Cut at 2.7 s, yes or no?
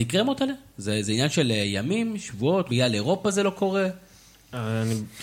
yes